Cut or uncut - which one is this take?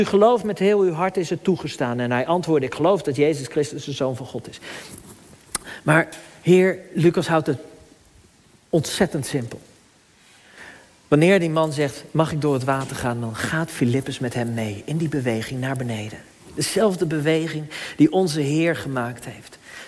uncut